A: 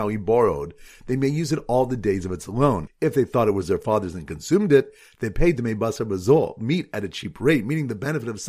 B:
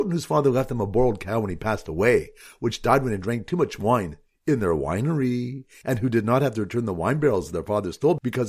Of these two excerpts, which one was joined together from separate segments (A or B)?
A